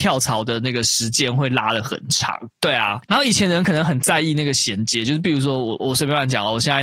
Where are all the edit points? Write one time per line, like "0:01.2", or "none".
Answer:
0:02.5
0:05.8